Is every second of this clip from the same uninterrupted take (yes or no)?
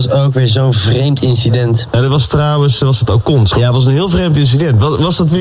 no